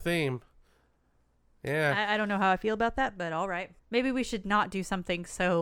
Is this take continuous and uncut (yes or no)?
no